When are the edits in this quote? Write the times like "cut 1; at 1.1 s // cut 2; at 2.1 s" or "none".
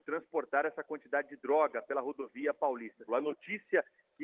cut 1; at 3.1 s